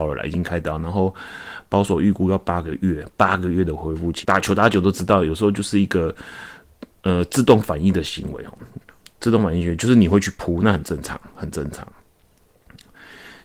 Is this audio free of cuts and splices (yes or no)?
no